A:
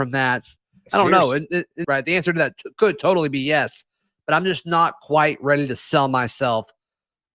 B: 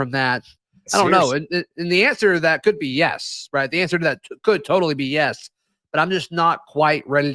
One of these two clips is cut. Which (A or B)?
A